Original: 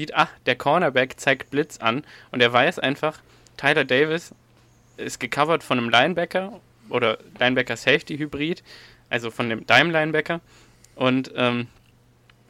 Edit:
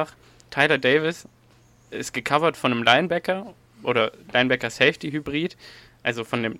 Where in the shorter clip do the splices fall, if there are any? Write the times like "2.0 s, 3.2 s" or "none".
none